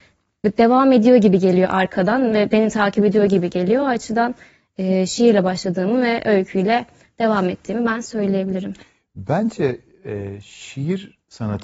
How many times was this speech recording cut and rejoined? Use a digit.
0